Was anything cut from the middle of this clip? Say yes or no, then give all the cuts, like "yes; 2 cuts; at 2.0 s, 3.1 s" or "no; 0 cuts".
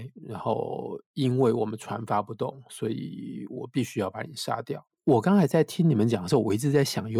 yes; 1 cut; at 5.0 s